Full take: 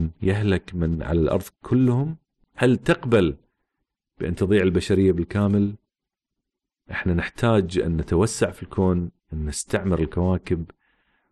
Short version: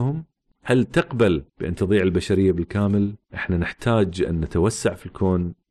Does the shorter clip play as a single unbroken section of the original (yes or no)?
no